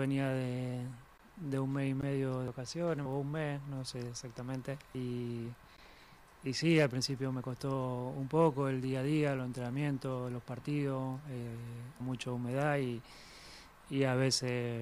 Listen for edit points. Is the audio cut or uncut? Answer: cut